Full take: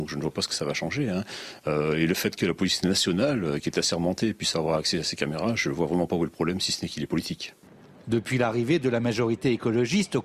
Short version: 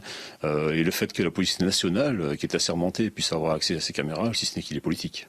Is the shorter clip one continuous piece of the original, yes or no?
no